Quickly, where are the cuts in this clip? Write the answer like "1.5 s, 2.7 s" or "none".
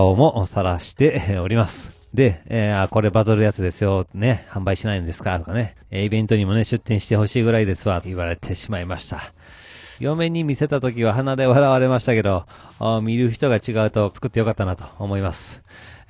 8.0 s, 10.0 s, 14.1 s